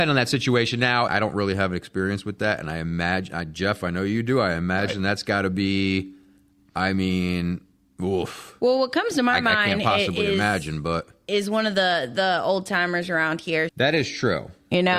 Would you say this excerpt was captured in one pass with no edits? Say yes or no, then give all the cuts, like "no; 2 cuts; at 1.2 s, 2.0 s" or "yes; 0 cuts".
no; 2 cuts; at 1.1 s, 13.7 s